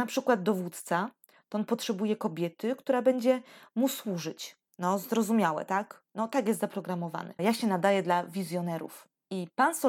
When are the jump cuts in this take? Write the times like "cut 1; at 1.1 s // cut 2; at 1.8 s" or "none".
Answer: cut 1; at 6.1 s // cut 2; at 7.4 s